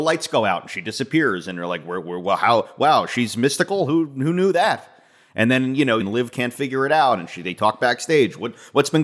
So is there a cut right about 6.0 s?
yes; 1 cut; at 6.0 s

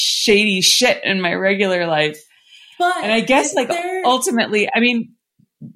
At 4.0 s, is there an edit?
no; 0 cuts

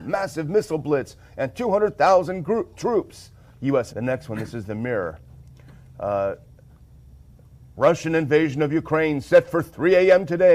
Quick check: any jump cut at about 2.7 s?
no; 1 cut; at 3.9 s

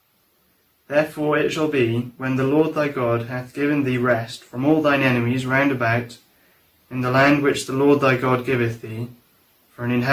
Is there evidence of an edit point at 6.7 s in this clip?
no; 0 cuts

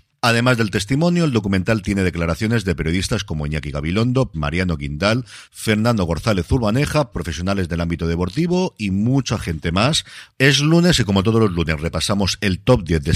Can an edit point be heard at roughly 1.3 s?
no; 3 cuts; at 4.3 s, 7.1 s, 10.3 s

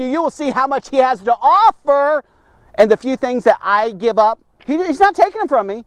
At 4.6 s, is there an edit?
no; 0 cuts

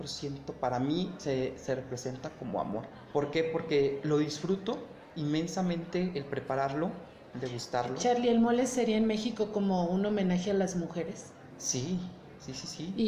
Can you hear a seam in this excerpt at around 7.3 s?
yes; 1 cut; at 7.3 s

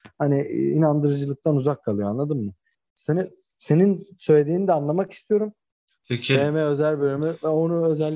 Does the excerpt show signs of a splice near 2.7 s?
no; 1 cut; at 5.9 s

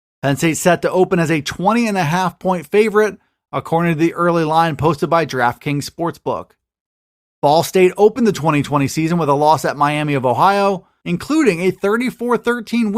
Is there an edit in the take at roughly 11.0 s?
yes; 1 cut; at 11.0 s

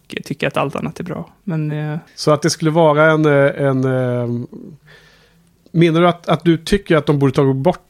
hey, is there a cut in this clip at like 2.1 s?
yes; 1 cut; at 2.1 s

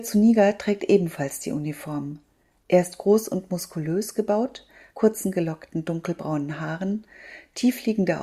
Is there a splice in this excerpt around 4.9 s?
yes; 1 cut; at 4.9 s

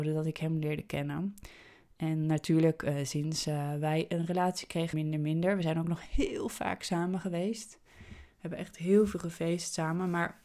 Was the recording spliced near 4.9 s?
yes; 1 cut; at 4.9 s

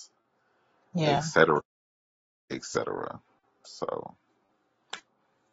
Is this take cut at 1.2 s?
no; 0 cuts

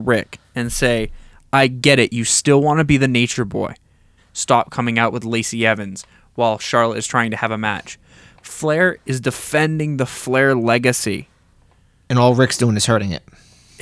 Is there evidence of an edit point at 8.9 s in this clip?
yes; 2 cuts; at 4.2 s, 8.9 s

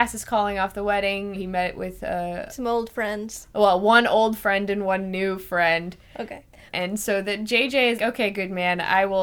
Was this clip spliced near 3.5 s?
no; 3 cuts; at 1.3 s, 6.7 s, 8.0 s

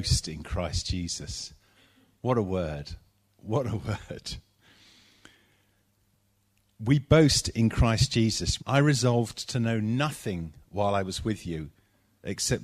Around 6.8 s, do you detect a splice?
no; 1 cut; at 8.6 s

